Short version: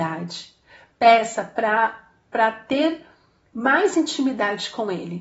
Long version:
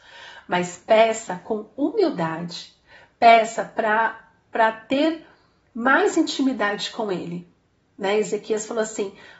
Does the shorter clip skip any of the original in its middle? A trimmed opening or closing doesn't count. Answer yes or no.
no